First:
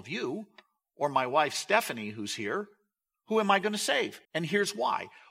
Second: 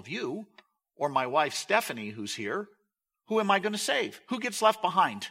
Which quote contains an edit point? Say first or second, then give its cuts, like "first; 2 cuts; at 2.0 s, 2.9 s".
first; 1 cut; at 4.2 s